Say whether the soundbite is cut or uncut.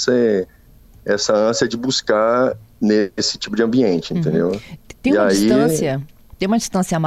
uncut